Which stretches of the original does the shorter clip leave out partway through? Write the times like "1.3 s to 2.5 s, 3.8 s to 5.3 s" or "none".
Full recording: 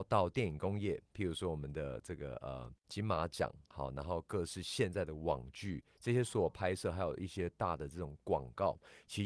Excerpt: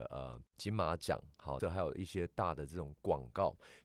3.9 s to 6.8 s